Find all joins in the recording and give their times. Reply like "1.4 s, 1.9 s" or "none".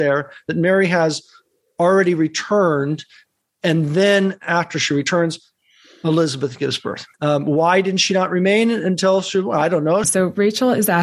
7.1 s, 10.0 s